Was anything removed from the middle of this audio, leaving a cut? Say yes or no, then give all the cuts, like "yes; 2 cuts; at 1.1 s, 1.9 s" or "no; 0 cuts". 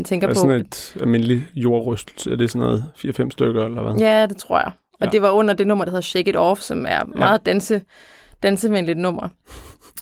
no; 0 cuts